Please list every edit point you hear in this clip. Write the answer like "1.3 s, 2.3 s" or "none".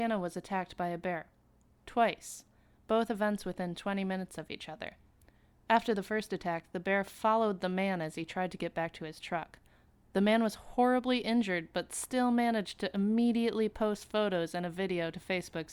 none